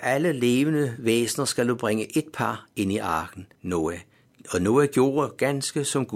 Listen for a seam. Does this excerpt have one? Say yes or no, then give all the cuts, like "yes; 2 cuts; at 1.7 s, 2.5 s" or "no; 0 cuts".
yes; 1 cut; at 3.5 s